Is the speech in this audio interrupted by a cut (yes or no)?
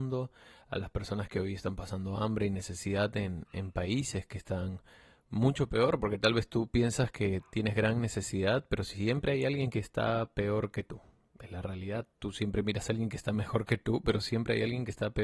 no